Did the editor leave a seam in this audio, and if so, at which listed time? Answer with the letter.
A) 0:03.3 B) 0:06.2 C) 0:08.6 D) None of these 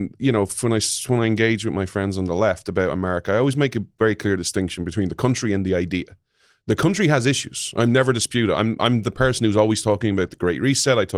D